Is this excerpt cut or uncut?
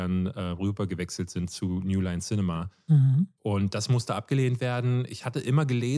uncut